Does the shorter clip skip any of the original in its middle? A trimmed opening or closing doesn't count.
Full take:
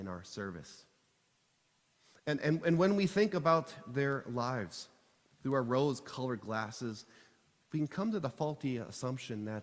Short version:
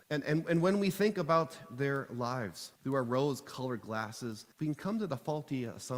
yes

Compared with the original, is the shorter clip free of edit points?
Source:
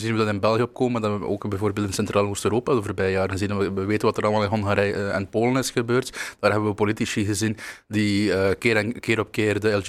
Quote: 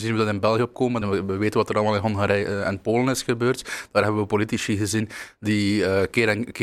no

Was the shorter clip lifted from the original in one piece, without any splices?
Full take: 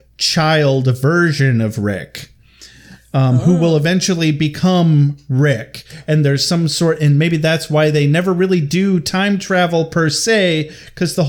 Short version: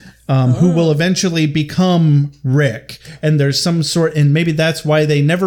yes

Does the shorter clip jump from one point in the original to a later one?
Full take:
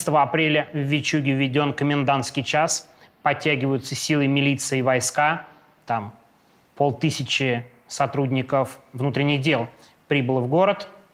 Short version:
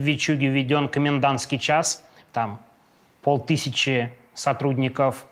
yes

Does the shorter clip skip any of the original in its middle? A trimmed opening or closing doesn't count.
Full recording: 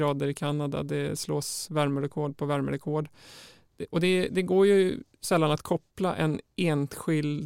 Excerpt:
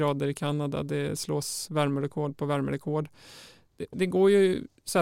yes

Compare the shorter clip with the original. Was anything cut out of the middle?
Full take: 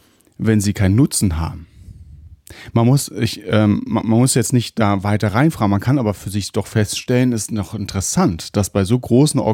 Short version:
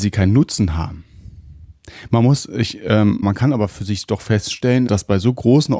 yes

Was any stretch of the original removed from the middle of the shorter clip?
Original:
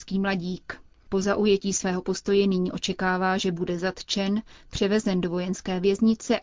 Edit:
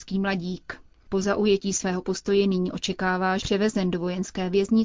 yes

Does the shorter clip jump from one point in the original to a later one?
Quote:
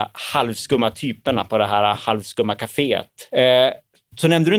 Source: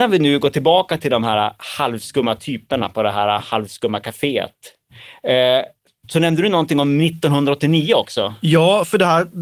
yes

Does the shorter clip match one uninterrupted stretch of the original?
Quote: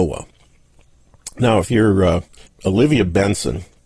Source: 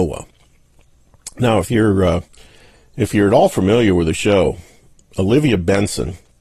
no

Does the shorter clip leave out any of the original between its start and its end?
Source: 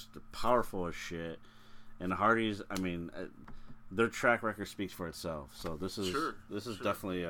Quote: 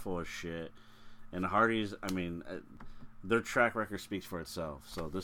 no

